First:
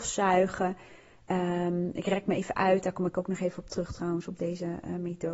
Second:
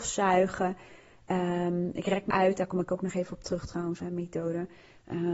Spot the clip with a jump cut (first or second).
second